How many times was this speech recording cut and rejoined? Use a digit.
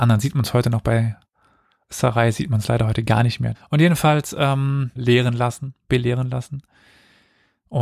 2